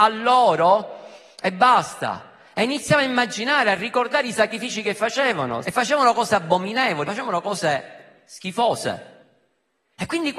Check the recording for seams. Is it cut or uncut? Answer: cut